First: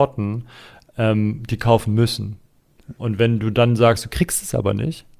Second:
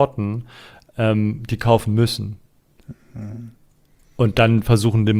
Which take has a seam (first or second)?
first